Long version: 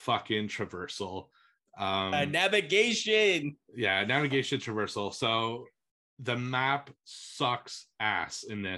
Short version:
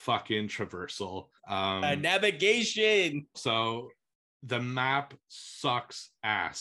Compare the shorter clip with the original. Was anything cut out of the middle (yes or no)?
yes